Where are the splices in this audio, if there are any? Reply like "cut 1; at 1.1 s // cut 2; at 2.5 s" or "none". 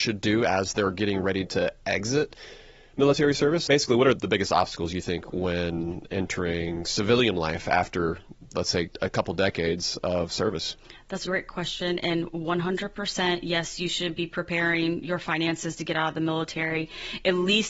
cut 1; at 4.1 s // cut 2; at 11.2 s